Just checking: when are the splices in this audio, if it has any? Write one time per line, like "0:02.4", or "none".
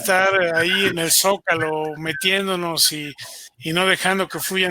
none